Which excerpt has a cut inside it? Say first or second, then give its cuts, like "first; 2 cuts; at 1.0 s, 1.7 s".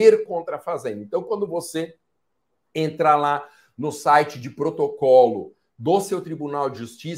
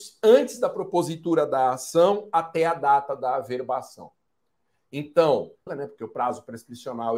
second; 1 cut; at 5.7 s